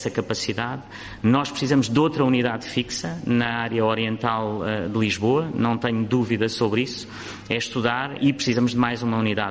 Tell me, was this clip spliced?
yes; 1 cut; at 8.2 s

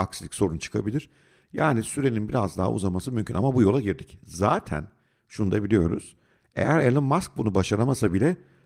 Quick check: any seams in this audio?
no; 0 cuts

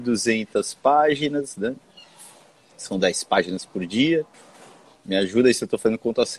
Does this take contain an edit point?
no; 0 cuts

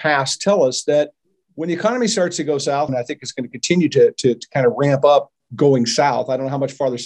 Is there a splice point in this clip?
yes; 1 cut; at 2.9 s

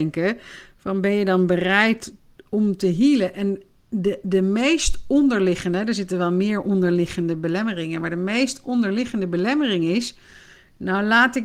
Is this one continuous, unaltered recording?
yes; 0 cuts

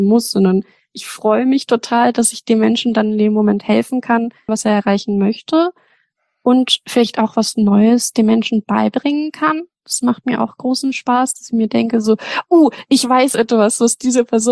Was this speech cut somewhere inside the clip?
yes; 1 cut; at 4.5 s

